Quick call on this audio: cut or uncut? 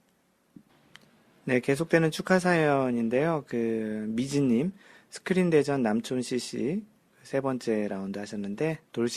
uncut